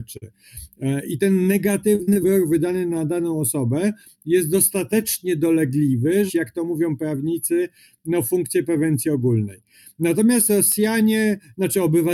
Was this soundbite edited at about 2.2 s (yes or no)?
yes